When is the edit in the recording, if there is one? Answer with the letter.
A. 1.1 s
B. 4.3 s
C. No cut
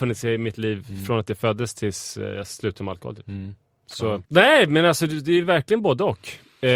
B